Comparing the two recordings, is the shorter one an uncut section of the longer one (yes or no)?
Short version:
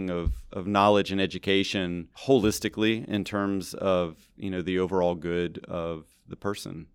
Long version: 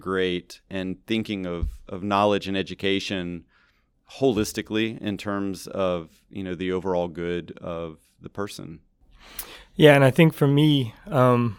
no